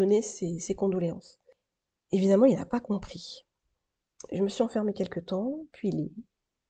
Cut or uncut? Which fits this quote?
uncut